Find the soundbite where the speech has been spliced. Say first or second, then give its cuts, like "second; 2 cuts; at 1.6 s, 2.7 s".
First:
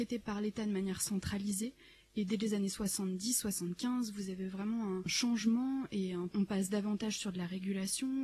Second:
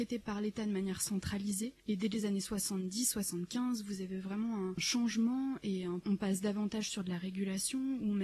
second; 1 cut; at 1.8 s